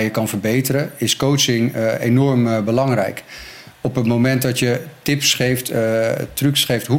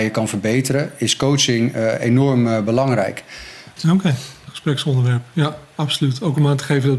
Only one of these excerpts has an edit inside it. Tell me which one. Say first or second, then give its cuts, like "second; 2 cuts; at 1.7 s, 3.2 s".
second; 1 cut; at 3.8 s